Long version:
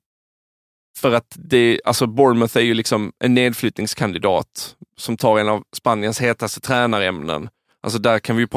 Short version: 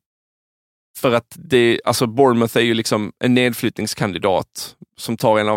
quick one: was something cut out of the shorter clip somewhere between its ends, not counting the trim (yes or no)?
no